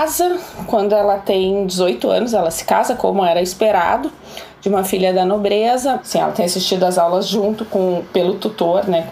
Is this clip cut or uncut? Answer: cut